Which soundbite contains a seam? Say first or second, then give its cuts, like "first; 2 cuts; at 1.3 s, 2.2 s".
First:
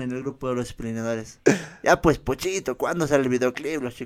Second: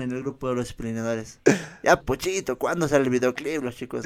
second; 1 cut; at 2.0 s